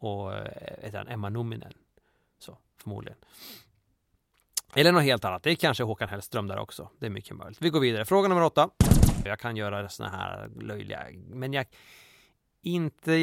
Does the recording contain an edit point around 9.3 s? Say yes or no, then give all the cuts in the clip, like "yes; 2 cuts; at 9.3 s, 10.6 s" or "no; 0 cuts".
yes; 1 cut; at 9.3 s